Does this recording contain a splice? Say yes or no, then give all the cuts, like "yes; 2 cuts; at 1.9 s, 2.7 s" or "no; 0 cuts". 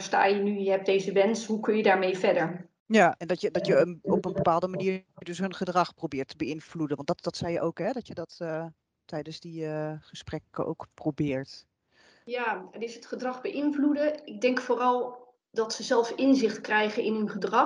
no; 0 cuts